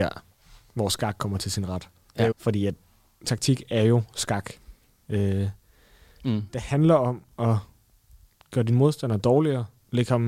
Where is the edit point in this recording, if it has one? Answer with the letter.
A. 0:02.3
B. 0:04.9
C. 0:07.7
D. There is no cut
A